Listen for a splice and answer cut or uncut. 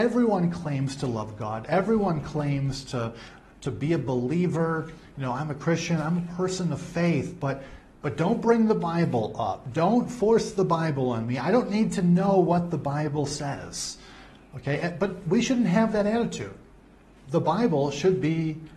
uncut